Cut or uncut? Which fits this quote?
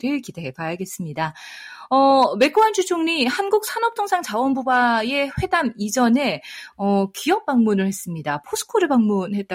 uncut